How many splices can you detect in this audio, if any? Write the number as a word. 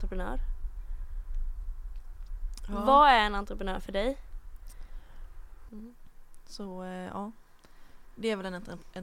one